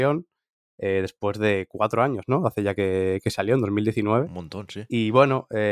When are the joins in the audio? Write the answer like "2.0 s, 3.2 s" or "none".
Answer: none